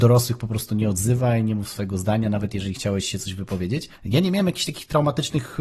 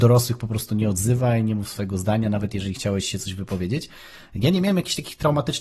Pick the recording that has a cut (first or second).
first